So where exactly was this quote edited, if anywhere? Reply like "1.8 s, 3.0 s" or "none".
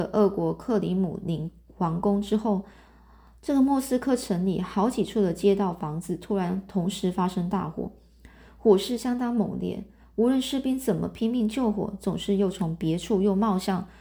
none